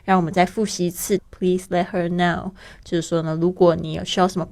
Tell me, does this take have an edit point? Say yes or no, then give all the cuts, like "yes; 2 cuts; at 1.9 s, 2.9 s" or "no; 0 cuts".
yes; 1 cut; at 1.2 s